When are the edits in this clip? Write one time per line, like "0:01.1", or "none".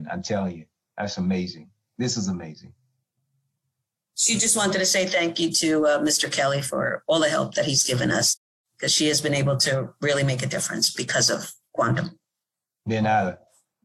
none